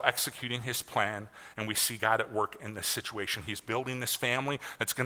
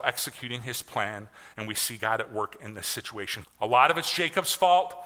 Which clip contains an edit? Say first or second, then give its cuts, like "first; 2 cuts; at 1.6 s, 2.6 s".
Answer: second; 1 cut; at 3.4 s